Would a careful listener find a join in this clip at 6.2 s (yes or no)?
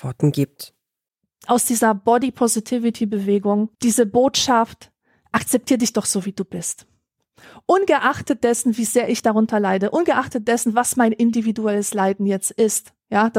no